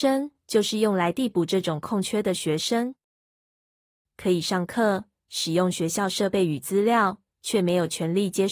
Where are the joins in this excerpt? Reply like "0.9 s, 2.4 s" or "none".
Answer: 4.0 s